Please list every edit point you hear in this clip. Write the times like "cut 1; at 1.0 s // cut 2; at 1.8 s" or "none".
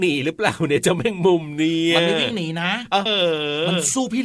cut 1; at 3.1 s